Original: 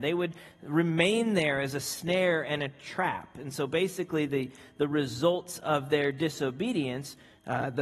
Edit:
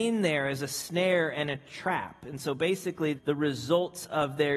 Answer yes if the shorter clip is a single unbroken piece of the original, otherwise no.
no